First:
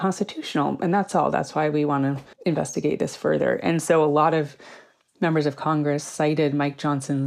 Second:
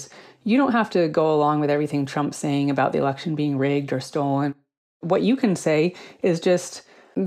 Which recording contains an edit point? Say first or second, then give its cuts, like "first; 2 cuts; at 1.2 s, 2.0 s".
first; 1 cut; at 2.3 s